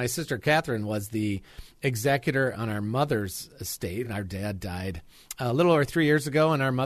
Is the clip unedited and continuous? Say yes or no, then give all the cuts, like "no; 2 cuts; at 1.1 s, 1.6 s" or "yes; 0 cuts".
yes; 0 cuts